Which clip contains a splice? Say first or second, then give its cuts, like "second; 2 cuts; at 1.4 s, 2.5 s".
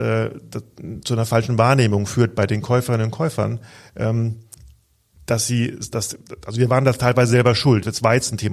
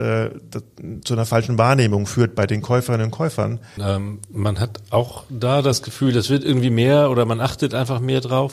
second; 1 cut; at 3.8 s